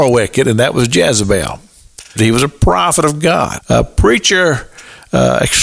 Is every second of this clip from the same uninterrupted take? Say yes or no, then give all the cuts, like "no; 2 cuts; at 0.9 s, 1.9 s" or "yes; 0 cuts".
no; 2 cuts; at 2.2 s, 3.6 s